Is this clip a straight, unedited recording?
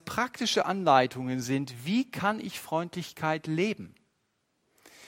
yes; 0 cuts

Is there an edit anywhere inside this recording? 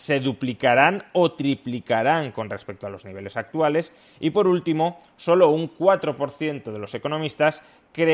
no; 0 cuts

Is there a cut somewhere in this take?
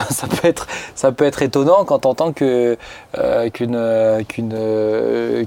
no; 0 cuts

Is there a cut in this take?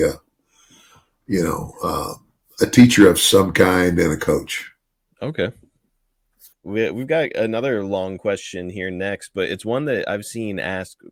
no; 0 cuts

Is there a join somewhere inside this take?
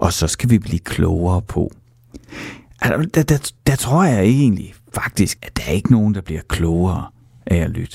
yes; 2 cuts; at 3.6 s, 5.4 s

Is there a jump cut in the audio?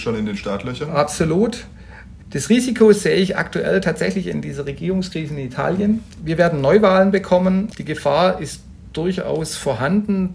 yes; 1 cut; at 2.2 s

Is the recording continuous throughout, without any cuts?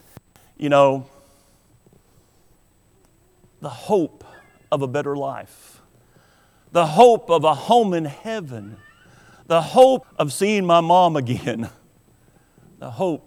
no; 1 cut; at 10.0 s

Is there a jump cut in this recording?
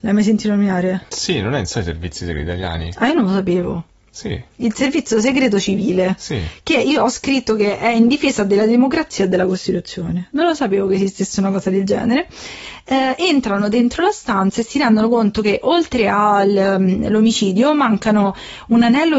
no; 0 cuts

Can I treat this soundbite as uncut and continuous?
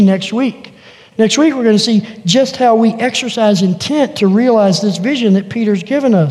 yes; 0 cuts

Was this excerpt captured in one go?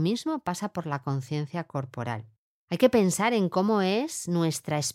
no; 1 cut; at 2.5 s

